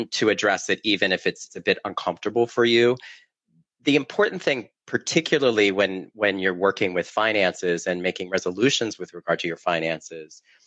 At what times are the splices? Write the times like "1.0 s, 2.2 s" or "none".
4.8 s

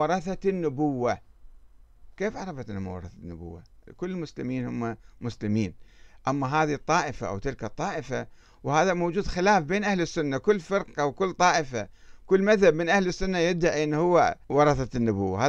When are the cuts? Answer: 14.4 s

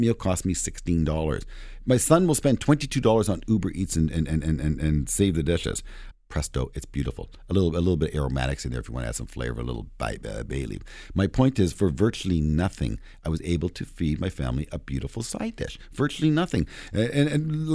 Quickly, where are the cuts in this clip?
6.1 s

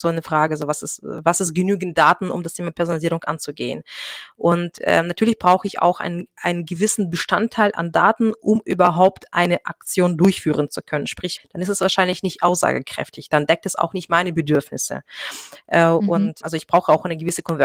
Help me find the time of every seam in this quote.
11.4 s, 16.4 s

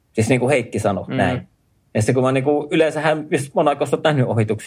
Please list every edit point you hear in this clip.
none

